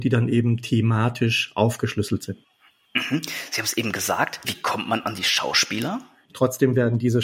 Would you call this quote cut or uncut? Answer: cut